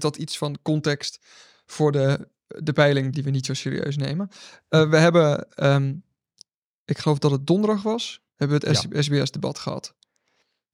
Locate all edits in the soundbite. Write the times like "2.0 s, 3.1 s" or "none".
3.1 s